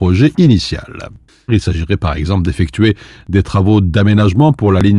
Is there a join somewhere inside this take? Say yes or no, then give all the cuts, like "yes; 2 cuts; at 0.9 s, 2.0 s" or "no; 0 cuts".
yes; 1 cut; at 1.5 s